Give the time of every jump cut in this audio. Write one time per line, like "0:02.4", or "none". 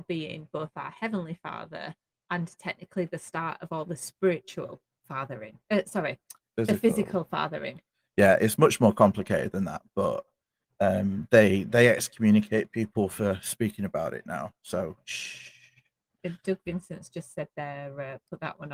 none